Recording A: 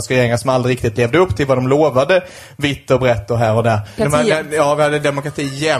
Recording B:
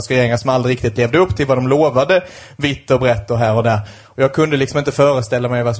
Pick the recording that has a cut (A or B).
A